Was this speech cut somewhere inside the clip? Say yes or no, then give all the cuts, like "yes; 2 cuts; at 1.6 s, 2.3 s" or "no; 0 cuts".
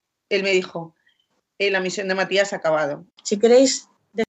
yes; 1 cut; at 3.1 s